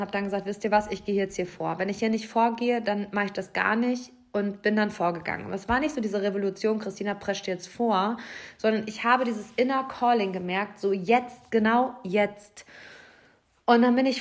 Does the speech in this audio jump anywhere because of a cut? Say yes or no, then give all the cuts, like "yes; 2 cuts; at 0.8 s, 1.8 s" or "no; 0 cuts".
no; 0 cuts